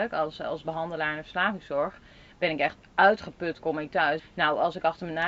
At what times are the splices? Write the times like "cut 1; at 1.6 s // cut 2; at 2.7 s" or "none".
cut 1; at 4.2 s

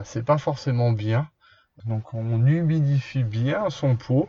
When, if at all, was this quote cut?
cut 1; at 1.8 s

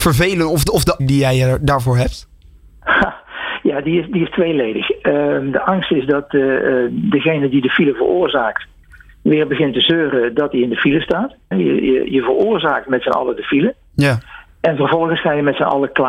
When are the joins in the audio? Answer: cut 1; at 1.0 s // cut 2; at 11.5 s

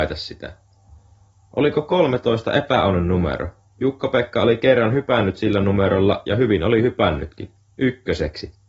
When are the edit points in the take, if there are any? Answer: none

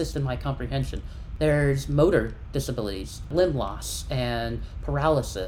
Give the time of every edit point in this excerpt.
none

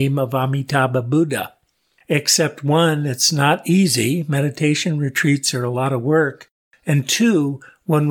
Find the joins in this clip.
none

